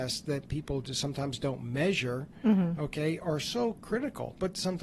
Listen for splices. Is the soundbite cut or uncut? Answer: uncut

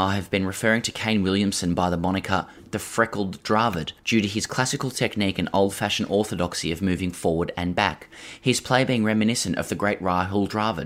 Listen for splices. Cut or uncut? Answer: cut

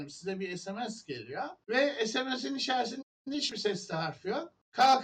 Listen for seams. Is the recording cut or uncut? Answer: uncut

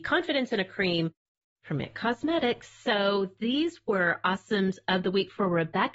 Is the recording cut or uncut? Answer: uncut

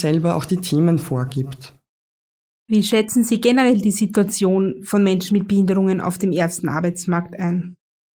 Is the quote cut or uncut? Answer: uncut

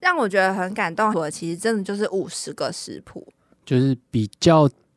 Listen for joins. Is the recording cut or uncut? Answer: cut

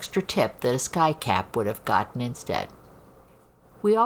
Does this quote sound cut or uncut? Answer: uncut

